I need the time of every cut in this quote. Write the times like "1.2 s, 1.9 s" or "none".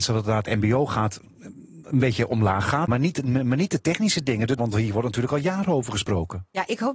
2.9 s, 4.6 s